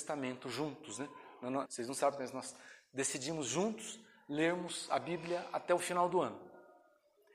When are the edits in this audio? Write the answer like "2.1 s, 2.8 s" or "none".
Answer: 1.7 s

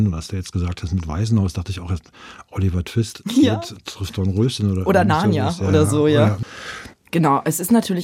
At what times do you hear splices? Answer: none

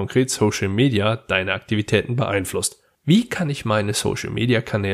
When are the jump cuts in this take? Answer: 2.9 s

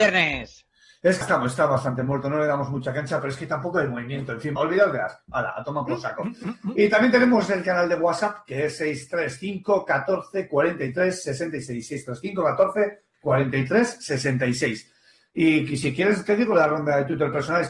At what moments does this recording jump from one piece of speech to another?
1.2 s, 4.6 s

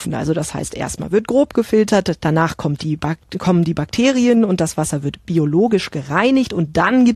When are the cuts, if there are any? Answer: 2.2 s

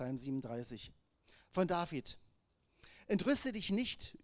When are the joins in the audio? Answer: none

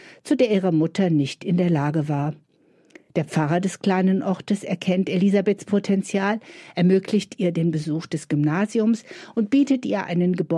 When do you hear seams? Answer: none

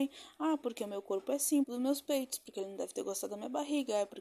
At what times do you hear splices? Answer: 1.6 s

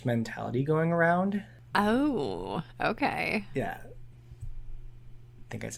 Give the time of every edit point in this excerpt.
4.1 s

